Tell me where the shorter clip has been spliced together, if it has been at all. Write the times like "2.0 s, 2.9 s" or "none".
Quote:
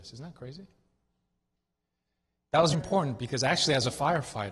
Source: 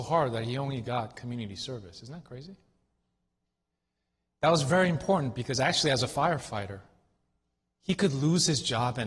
2.7 s